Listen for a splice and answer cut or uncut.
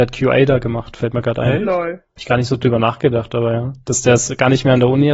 uncut